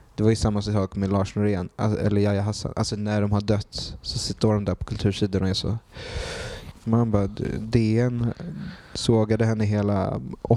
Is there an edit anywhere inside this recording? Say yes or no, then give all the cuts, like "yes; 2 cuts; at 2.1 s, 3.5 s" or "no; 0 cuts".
yes; 1 cut; at 6.7 s